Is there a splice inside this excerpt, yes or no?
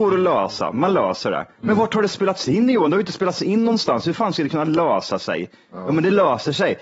no